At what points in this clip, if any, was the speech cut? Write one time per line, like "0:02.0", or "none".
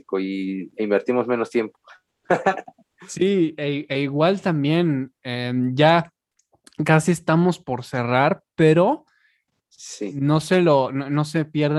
none